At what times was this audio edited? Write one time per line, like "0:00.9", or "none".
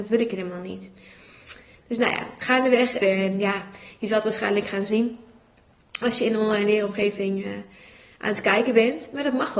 0:03.0